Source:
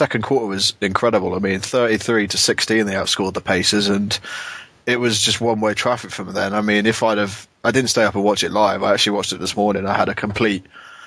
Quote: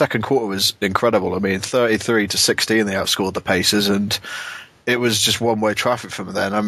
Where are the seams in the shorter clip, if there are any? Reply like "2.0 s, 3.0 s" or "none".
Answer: none